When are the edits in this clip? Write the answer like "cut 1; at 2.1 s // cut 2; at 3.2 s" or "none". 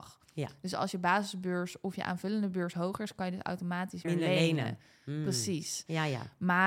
cut 1; at 4.0 s